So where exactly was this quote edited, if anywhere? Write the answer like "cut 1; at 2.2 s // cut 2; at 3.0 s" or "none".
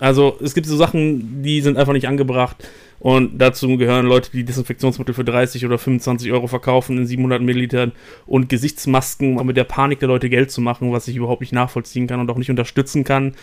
cut 1; at 9.4 s

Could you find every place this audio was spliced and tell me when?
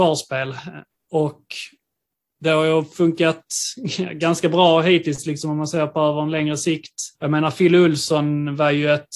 cut 1; at 0.9 s // cut 2; at 7.1 s

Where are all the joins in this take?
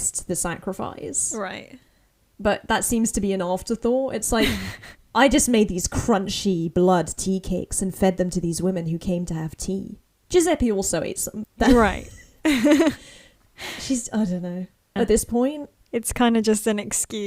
cut 1; at 11.4 s // cut 2; at 15.0 s

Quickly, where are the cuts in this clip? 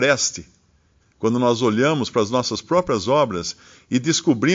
cut 1; at 1.0 s

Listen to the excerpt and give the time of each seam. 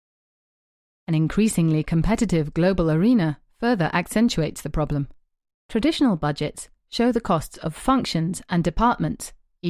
cut 1; at 5.5 s

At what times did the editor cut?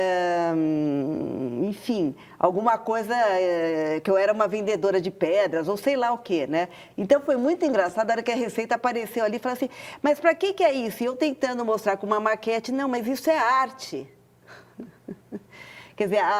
cut 1; at 6.9 s

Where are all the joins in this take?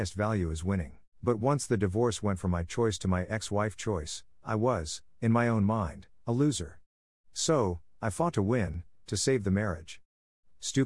cut 1; at 1.1 s

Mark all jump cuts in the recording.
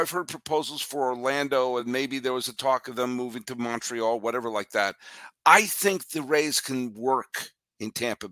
none

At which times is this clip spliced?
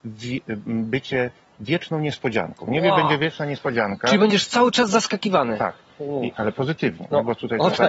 none

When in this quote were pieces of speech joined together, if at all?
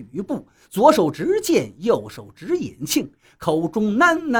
none

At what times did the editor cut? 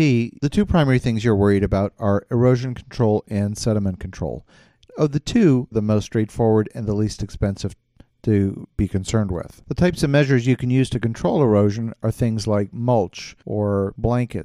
cut 1; at 5.7 s

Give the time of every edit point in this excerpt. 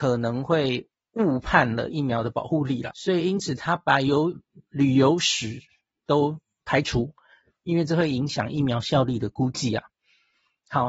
cut 1; at 2.9 s

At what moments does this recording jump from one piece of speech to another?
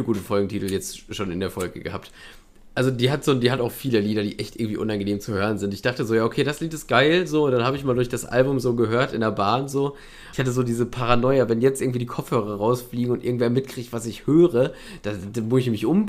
cut 1; at 10.3 s

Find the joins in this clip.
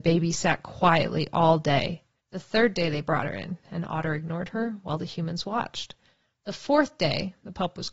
cut 1; at 2.2 s // cut 2; at 3.6 s

